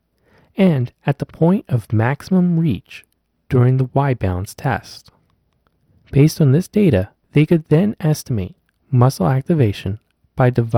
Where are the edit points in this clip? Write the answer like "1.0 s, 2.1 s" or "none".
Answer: none